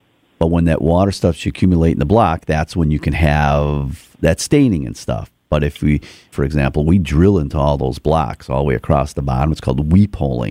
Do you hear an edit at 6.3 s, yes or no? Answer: yes